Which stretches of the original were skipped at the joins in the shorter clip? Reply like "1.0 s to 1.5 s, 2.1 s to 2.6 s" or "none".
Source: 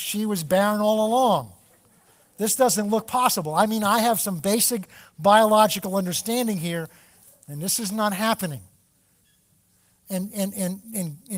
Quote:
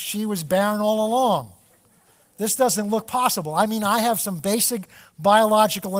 none